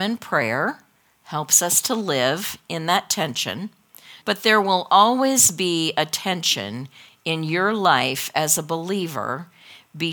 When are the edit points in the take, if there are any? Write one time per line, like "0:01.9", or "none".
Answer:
0:04.2